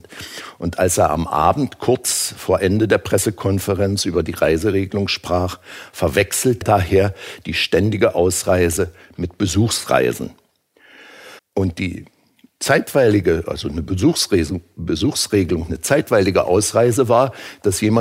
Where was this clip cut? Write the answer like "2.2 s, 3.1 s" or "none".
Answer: 6.6 s, 11.4 s